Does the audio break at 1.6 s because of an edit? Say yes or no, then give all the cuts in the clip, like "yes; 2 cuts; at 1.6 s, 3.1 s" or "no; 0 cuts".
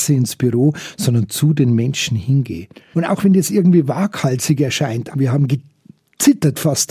no; 2 cuts; at 2.9 s, 5.1 s